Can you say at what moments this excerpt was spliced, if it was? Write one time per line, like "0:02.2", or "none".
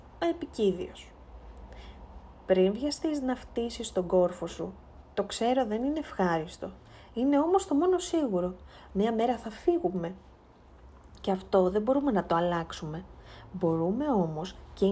none